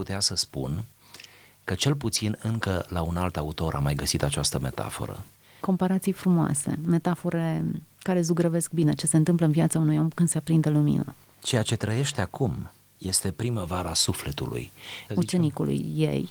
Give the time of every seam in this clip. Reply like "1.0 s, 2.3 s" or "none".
5.6 s, 15.1 s